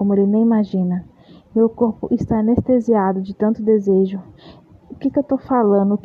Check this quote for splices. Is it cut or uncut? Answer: uncut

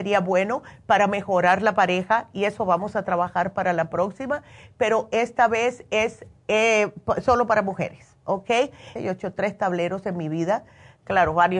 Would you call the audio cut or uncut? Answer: cut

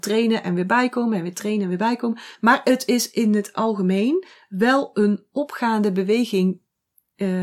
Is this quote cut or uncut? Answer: uncut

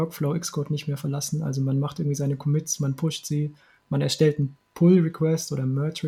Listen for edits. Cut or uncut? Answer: uncut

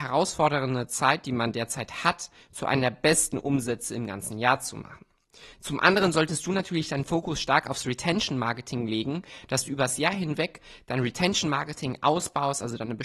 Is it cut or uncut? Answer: cut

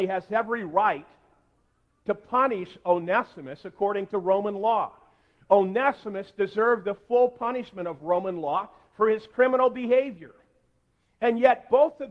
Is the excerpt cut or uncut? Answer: uncut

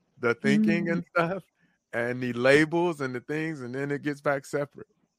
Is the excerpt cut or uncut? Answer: uncut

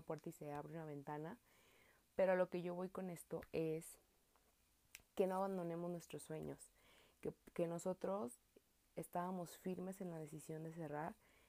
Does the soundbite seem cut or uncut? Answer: cut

